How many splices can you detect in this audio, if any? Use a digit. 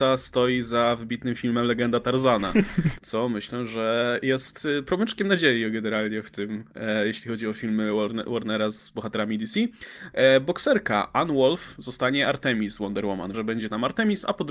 3